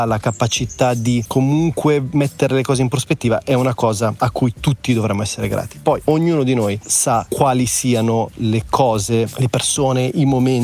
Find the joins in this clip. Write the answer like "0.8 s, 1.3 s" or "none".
6.1 s